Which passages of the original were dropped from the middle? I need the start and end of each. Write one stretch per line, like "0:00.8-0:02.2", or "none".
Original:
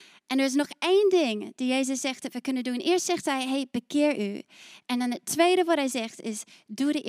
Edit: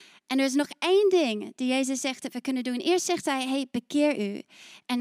none